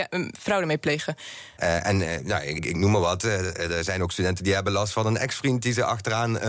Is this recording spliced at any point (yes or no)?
yes